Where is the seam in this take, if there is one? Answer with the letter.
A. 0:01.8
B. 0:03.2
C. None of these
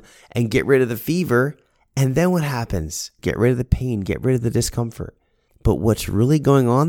B